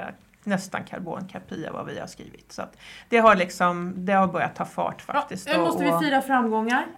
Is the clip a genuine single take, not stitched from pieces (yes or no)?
yes